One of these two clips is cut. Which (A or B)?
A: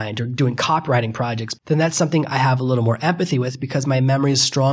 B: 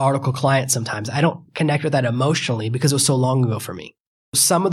A